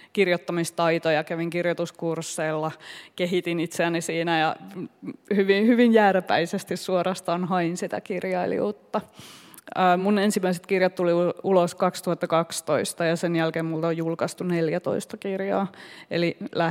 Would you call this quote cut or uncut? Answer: uncut